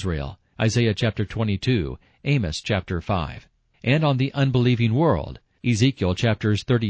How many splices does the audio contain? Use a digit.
0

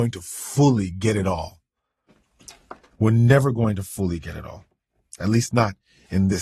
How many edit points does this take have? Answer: 0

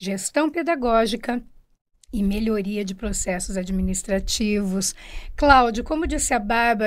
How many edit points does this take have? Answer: 0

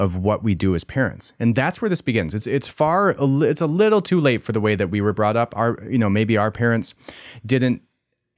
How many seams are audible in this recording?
1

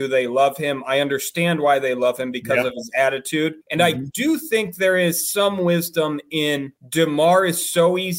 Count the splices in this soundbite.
2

